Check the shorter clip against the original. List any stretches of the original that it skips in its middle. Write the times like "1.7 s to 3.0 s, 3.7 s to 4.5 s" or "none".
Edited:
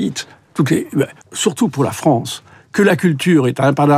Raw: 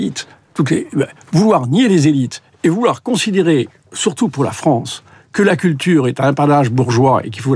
1.2 s to 3.8 s